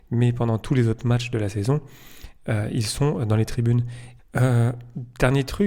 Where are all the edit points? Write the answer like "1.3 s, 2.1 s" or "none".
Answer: 4.2 s